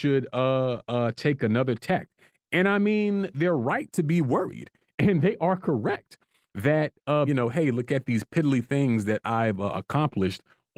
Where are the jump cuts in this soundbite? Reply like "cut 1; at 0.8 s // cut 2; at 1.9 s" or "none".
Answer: cut 1; at 7.3 s